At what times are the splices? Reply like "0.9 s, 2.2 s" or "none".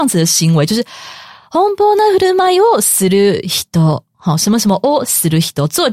none